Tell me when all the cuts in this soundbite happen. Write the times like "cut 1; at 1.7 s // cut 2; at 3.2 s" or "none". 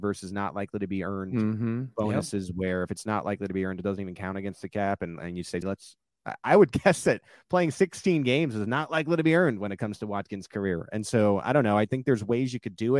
cut 1; at 5.6 s